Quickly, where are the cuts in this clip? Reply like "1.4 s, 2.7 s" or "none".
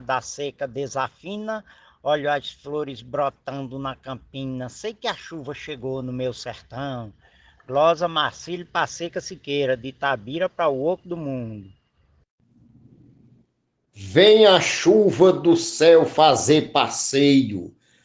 none